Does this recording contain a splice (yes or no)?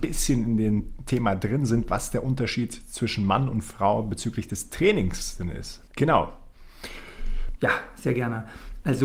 yes